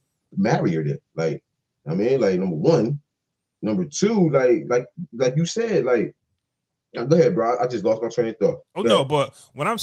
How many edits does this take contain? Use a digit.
0